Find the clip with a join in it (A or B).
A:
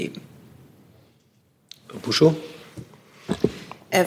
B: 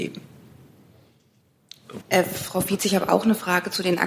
B